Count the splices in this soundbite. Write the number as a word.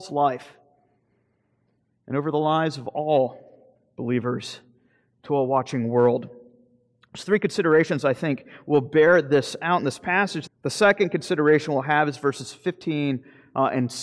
one